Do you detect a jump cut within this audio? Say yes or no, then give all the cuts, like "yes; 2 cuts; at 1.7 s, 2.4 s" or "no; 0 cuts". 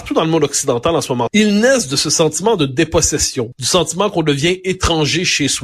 yes; 2 cuts; at 1.3 s, 3.5 s